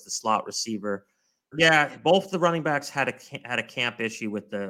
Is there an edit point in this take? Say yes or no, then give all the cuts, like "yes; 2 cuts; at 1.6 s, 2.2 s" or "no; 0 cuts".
yes; 1 cut; at 1.5 s